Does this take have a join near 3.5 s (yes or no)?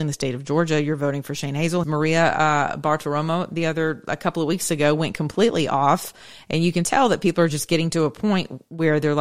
no